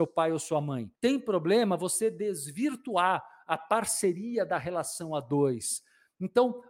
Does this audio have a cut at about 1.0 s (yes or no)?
yes